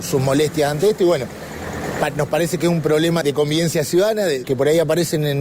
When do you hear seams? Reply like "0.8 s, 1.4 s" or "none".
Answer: 3.2 s, 4.4 s

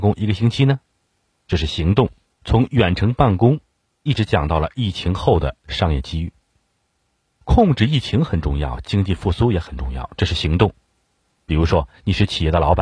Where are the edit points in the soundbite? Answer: 2.3 s

